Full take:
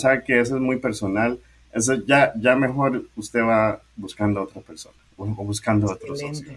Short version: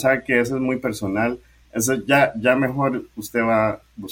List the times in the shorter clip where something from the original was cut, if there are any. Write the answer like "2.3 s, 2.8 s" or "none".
none